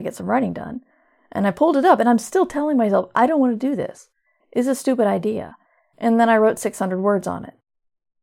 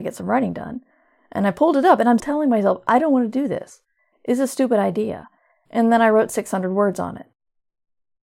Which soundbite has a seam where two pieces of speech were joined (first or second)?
second